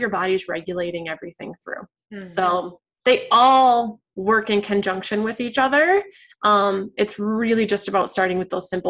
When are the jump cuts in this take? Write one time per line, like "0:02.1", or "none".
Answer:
none